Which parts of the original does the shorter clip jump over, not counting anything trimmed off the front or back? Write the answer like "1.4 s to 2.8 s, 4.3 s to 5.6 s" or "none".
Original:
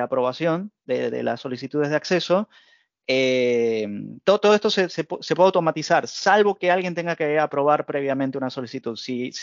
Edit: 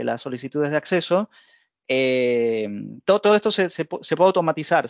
none